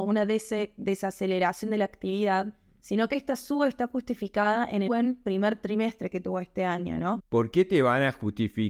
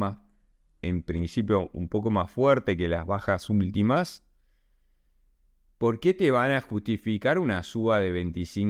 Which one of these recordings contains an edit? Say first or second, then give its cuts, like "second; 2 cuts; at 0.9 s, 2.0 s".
first; 2 cuts; at 4.9 s, 7.2 s